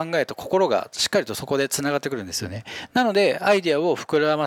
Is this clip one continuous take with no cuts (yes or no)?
yes